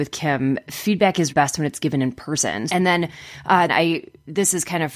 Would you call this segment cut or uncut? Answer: cut